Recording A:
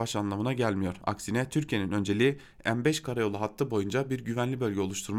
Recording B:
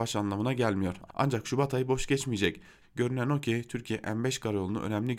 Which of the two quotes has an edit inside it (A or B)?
B